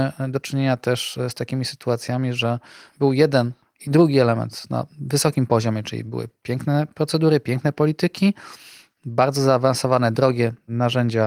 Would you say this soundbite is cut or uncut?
uncut